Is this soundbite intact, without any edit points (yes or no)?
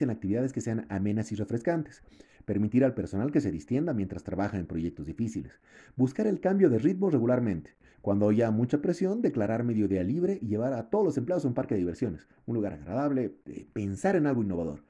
yes